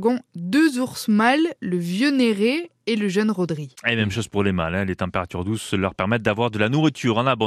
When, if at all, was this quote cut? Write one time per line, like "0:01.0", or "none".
none